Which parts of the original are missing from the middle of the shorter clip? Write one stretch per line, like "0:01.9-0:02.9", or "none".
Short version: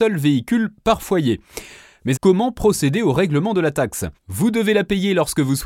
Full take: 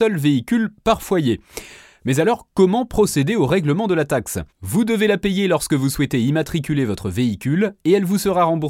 0:02.2-0:02.5

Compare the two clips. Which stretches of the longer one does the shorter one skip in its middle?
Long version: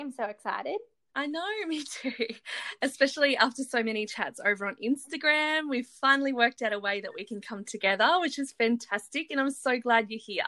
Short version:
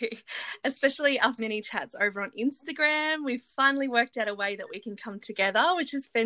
0:03.6-0:03.8

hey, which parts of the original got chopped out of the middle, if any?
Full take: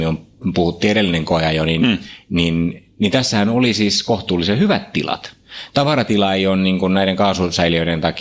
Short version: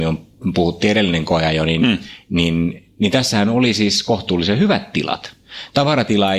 none

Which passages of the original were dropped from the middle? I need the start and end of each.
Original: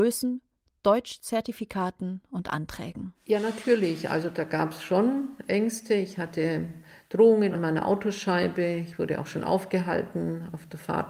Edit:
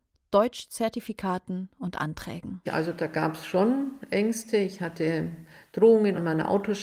0:03.2-0:04.0

